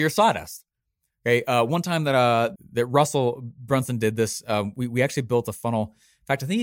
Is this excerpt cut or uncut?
uncut